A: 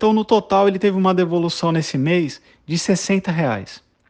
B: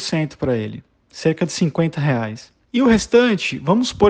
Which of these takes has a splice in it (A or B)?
B